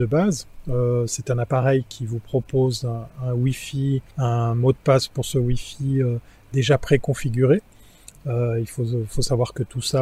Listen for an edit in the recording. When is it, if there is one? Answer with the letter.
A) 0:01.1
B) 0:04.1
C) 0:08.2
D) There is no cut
B